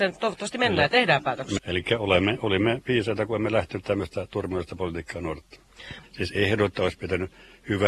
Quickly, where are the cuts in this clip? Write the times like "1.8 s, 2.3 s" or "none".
1.6 s, 6.0 s